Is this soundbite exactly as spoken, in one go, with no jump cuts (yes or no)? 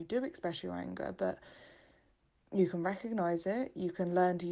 yes